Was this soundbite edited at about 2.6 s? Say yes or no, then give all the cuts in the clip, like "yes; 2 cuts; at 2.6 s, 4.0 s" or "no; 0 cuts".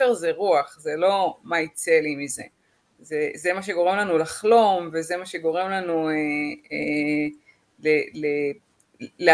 no; 0 cuts